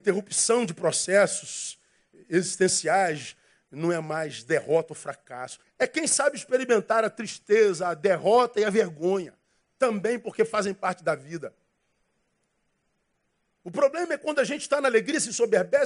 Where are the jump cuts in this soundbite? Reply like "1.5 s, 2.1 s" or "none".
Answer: 5.6 s